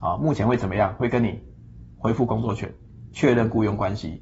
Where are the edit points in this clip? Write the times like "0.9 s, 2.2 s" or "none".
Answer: none